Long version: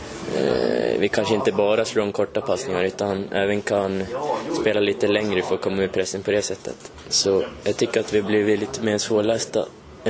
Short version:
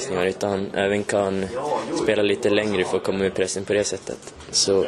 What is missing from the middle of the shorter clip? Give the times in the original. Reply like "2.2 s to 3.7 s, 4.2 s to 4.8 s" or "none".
none